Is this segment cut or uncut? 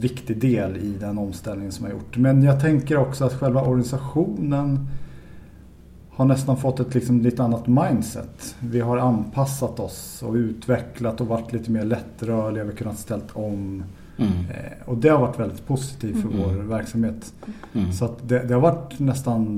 uncut